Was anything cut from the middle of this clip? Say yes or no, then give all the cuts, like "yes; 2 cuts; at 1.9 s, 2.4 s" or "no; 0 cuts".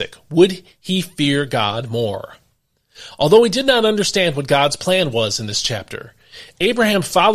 no; 0 cuts